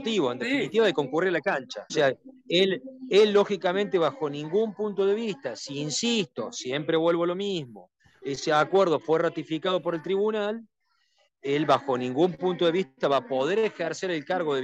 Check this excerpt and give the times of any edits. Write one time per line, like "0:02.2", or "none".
0:01.9